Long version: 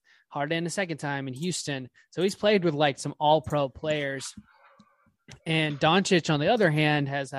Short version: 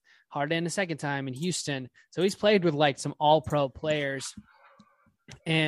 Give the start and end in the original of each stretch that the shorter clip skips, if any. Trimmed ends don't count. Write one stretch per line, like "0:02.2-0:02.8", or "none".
none